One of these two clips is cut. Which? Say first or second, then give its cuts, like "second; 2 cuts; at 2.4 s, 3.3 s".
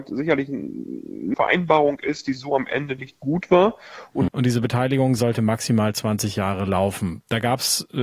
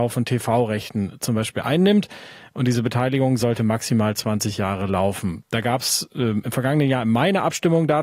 first; 2 cuts; at 1.3 s, 4.3 s